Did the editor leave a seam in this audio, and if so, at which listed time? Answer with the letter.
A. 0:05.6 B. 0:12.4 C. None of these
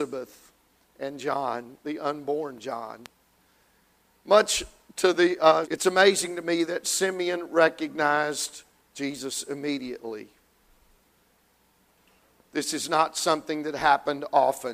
A